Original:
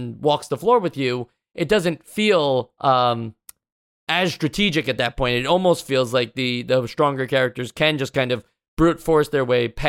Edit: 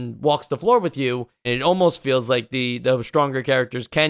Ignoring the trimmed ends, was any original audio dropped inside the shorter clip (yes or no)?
yes